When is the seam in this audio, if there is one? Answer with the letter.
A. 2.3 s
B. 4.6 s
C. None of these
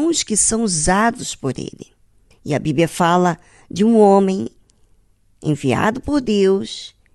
A